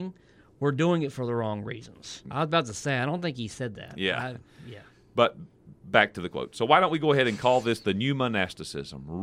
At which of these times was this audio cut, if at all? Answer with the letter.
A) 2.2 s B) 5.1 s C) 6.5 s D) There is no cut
A